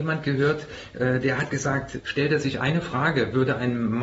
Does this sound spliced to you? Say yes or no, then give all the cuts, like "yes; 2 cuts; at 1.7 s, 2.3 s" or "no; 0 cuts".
yes; 1 cut; at 2.0 s